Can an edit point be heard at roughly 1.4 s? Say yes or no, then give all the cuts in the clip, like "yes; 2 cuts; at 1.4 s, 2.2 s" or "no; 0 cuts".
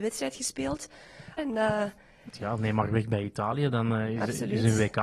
yes; 1 cut; at 1.4 s